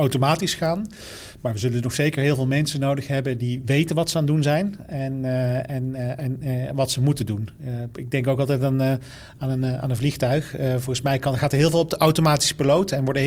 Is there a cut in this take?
no; 0 cuts

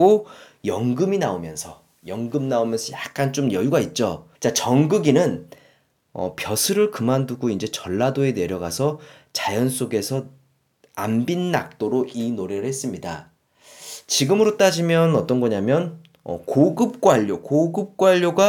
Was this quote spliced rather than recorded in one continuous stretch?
yes; 1 cut; at 4.3 s

